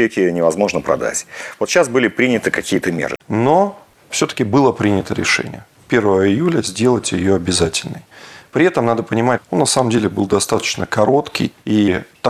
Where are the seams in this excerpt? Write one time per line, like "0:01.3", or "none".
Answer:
0:03.2
0:09.4